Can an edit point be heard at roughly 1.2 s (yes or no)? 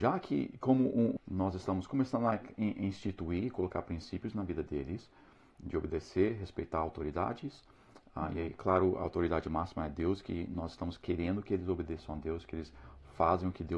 yes